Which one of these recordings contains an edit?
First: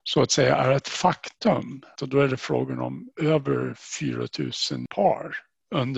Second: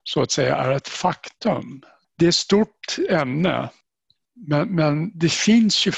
first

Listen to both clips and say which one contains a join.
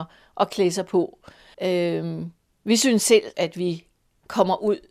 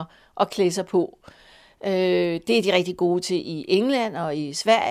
first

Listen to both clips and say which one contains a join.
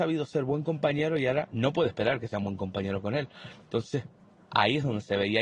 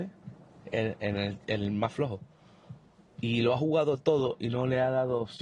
first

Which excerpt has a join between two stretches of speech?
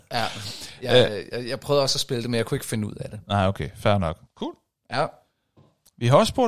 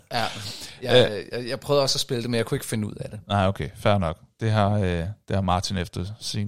first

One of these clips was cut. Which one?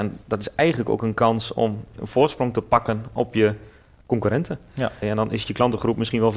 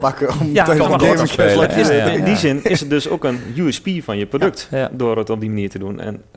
first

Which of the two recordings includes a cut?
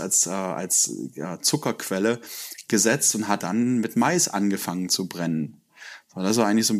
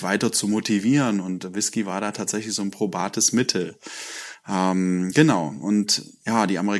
first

